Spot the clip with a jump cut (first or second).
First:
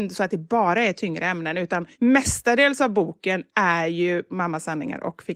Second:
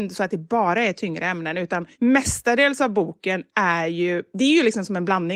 first